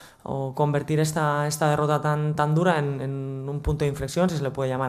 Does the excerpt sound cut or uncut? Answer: uncut